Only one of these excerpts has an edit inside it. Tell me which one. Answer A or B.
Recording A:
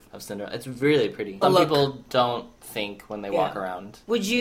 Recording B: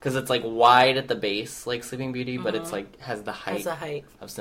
A